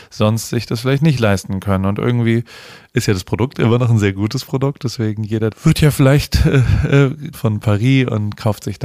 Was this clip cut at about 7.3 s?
yes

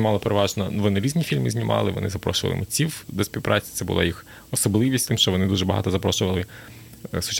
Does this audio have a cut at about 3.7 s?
no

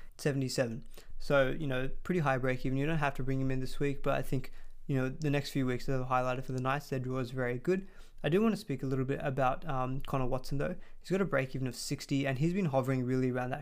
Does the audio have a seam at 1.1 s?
no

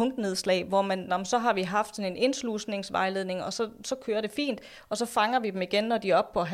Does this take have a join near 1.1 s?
yes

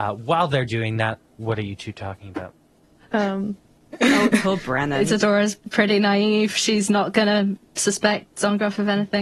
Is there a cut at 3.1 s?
yes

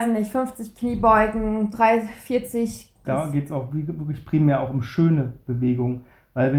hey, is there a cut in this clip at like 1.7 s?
no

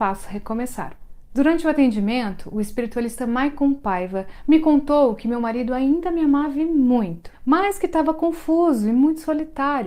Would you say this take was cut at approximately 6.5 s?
no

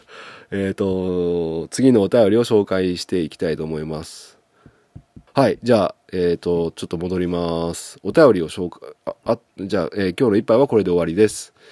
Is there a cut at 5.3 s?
yes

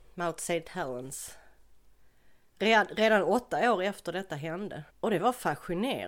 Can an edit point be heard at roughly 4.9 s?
yes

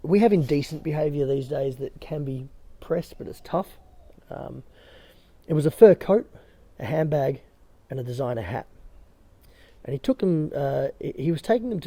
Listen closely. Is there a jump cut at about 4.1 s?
yes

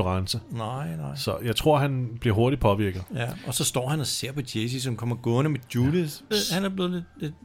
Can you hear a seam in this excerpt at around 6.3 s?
yes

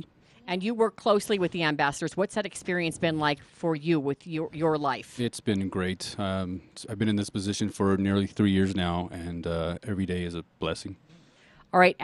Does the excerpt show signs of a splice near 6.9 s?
no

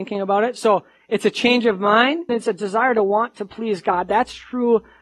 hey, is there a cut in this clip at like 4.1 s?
no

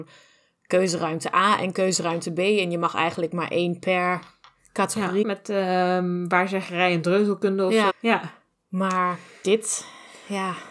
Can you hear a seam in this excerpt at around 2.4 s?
no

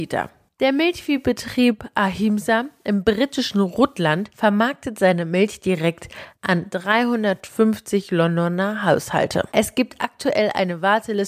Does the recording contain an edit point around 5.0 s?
no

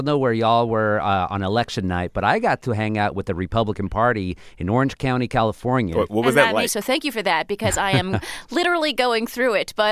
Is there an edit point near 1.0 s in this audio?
no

